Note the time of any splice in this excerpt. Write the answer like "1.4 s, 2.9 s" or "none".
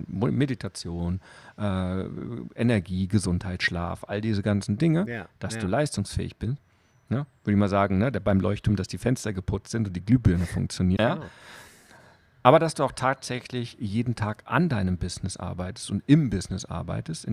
11.0 s